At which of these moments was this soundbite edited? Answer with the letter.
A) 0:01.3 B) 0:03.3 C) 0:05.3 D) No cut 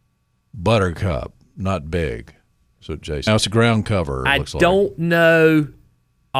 B